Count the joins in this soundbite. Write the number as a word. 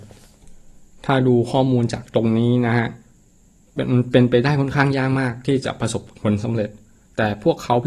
zero